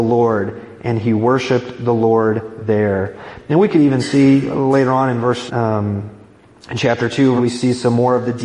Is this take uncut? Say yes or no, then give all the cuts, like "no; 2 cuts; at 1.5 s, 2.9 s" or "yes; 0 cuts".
no; 2 cuts; at 5.5 s, 7.4 s